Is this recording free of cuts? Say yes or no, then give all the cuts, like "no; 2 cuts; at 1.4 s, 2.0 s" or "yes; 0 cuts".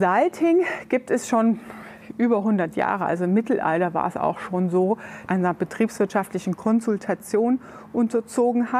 no; 1 cut; at 5.3 s